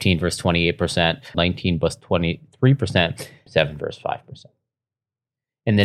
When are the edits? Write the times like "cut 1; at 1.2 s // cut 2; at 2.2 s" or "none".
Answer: cut 1; at 1.3 s // cut 2; at 3.5 s